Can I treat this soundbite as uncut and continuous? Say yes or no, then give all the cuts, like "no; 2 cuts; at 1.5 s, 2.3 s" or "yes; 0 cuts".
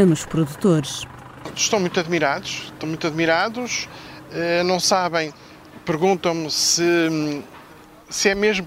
yes; 0 cuts